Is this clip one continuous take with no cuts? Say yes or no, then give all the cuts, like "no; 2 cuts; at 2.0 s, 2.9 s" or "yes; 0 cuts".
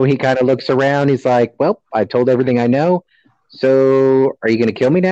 yes; 0 cuts